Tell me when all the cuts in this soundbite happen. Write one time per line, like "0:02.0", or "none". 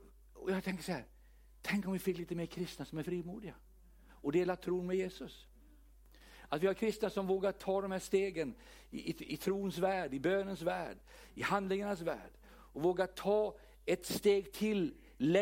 none